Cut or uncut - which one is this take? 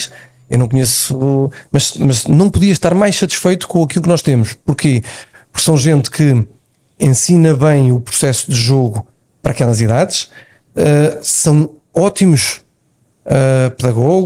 uncut